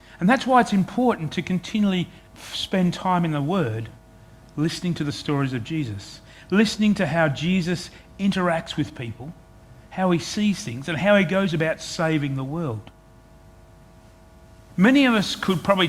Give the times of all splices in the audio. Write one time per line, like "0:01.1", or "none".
0:02.3
0:14.7